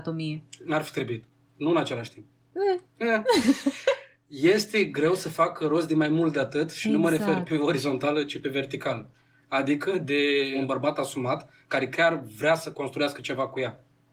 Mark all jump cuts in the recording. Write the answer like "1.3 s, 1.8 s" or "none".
1.5 s